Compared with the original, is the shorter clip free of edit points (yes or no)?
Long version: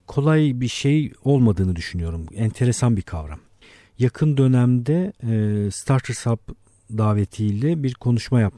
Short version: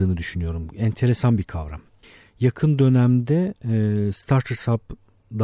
yes